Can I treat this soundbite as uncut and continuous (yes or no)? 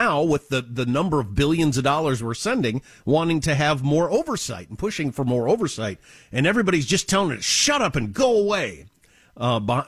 yes